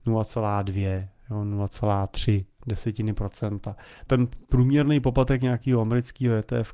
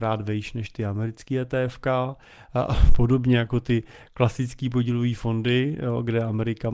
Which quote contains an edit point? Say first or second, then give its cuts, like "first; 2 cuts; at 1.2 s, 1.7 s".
first; 1 cut; at 4.1 s